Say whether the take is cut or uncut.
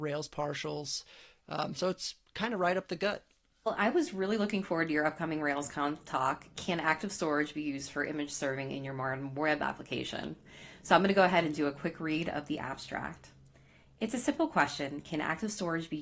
uncut